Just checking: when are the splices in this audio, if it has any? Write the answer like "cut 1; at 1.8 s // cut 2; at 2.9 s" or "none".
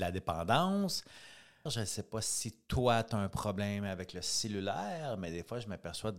cut 1; at 1.7 s